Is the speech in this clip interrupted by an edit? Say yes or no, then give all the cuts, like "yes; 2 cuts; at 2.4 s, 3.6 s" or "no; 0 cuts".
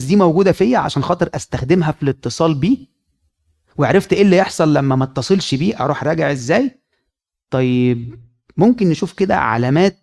no; 0 cuts